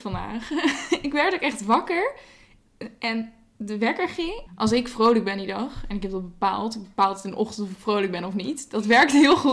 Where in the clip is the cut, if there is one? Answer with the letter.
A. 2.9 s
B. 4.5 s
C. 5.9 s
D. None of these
B